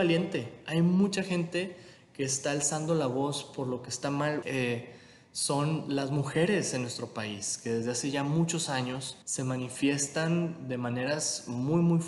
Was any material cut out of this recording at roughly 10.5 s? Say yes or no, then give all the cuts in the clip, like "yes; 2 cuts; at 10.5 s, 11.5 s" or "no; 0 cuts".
no; 2 cuts; at 4.4 s, 9.2 s